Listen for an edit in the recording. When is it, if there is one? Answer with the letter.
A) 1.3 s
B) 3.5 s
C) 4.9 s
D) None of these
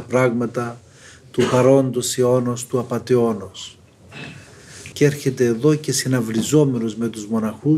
C